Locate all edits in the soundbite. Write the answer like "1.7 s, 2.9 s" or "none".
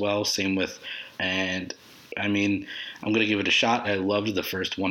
1.2 s, 3.8 s